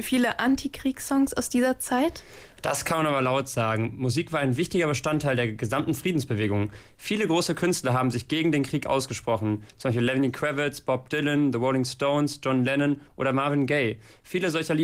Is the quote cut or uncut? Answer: uncut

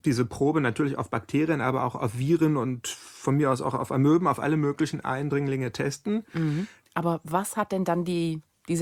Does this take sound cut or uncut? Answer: cut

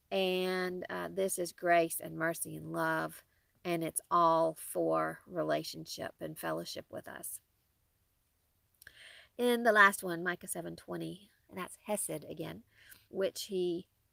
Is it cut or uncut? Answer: cut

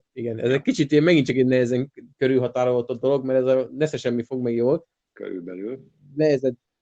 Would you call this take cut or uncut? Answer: uncut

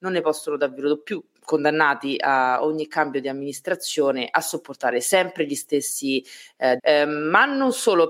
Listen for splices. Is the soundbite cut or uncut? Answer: cut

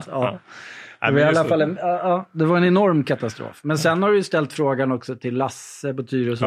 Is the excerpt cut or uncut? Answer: uncut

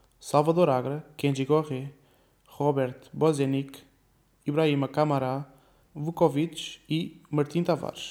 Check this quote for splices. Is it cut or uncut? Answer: cut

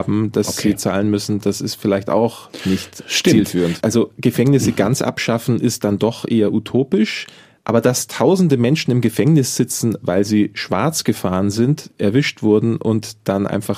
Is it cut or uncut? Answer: cut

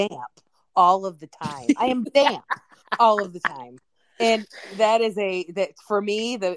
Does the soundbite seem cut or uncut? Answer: uncut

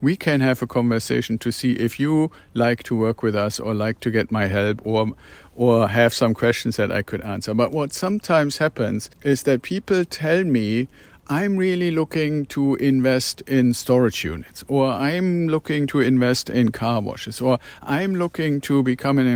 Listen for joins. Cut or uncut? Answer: cut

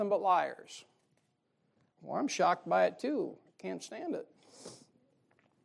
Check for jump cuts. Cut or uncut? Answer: cut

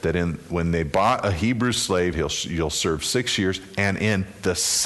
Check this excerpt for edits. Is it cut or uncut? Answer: cut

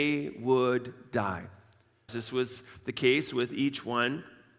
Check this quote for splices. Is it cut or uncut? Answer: cut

